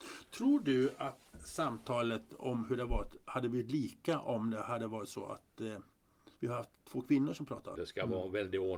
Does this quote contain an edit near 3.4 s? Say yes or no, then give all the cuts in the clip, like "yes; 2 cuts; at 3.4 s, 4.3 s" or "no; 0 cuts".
no; 3 cuts; at 1.3 s, 6.3 s, 7.7 s